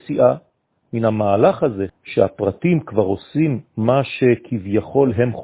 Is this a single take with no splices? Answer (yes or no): no